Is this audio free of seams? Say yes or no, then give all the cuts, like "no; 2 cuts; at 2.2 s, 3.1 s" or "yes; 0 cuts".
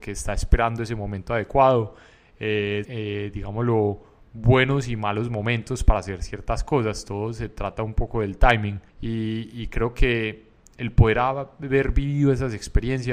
no; 2 cuts; at 2.8 s, 8.9 s